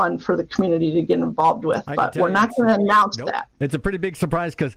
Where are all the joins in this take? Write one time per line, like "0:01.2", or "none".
none